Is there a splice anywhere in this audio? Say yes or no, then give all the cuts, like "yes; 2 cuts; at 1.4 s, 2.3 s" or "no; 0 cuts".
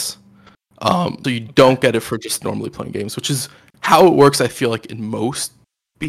yes; 1 cut; at 1.2 s